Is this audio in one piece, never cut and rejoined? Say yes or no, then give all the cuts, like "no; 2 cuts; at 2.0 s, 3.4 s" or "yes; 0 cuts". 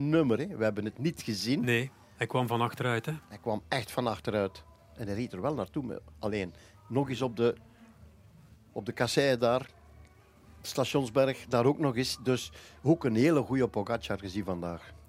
yes; 0 cuts